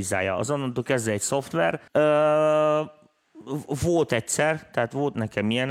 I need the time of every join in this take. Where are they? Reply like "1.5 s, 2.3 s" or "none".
1.9 s